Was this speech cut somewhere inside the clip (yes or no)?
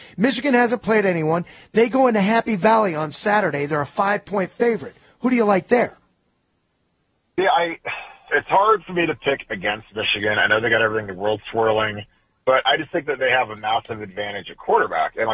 yes